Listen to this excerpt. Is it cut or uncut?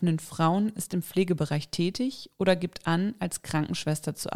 uncut